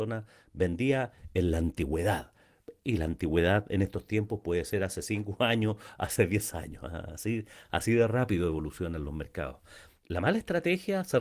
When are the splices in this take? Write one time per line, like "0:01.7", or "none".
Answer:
0:10.0